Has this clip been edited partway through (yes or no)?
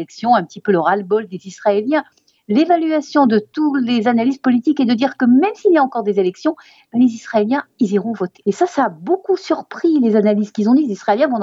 yes